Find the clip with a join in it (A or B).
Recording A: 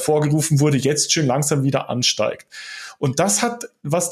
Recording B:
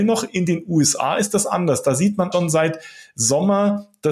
B